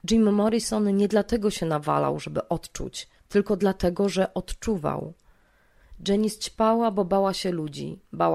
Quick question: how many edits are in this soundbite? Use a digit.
1